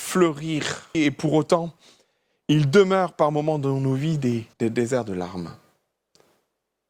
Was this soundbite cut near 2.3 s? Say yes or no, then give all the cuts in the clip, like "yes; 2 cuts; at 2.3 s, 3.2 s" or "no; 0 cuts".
no; 2 cuts; at 0.9 s, 4.5 s